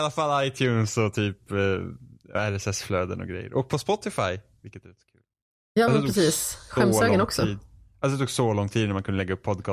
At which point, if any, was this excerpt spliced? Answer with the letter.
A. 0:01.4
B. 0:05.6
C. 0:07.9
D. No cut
D